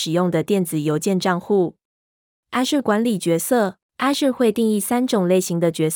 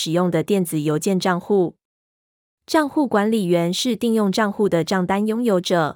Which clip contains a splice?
first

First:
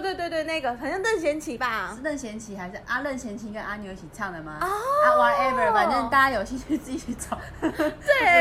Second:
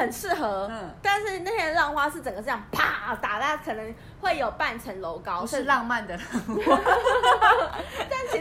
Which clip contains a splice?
first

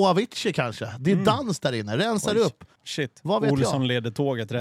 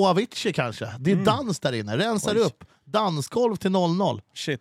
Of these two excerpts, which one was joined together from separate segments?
first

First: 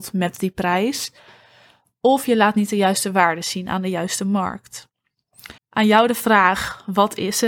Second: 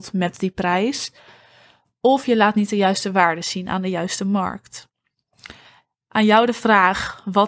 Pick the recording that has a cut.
first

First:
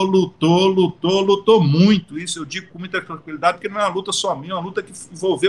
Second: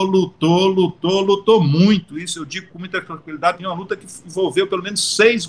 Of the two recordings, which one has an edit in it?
second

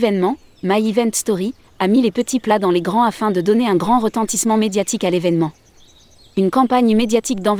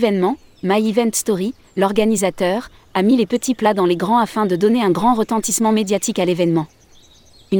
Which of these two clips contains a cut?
first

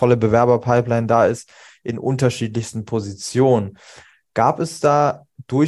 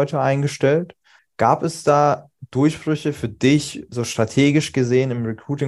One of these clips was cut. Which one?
second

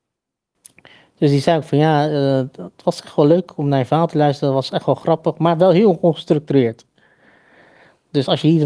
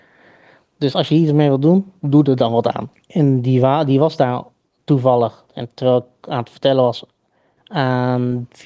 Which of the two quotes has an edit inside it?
second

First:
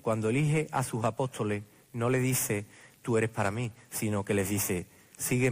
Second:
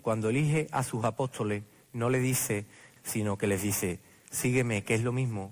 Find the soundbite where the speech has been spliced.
second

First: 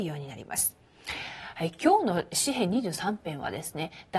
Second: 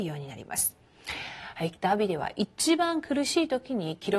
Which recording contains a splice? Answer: second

